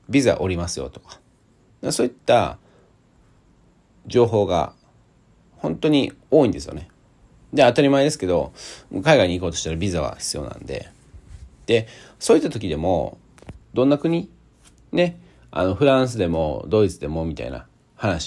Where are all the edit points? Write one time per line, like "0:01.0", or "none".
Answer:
0:13.6